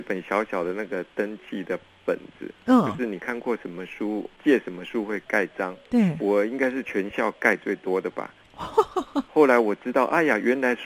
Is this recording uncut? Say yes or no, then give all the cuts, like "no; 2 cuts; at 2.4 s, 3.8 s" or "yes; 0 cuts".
no; 2 cuts; at 5.8 s, 9.3 s